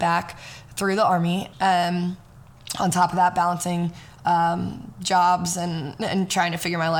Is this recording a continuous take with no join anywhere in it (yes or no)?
no